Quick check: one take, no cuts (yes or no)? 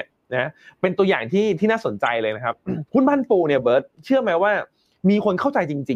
no